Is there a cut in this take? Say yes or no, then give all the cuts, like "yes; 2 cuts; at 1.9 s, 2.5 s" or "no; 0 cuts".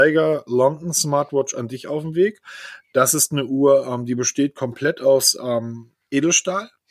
no; 0 cuts